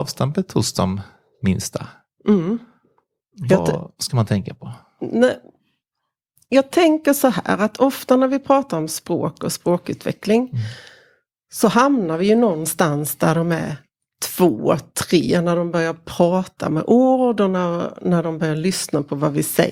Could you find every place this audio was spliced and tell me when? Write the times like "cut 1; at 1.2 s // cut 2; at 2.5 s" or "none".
none